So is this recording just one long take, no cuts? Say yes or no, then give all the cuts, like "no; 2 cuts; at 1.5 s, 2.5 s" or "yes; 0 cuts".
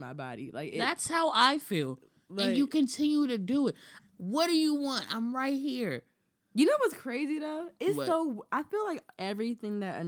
no; 1 cut; at 4.0 s